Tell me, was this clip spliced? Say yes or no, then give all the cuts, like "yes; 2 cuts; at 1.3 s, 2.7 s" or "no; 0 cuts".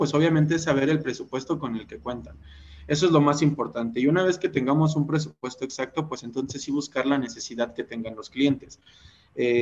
no; 0 cuts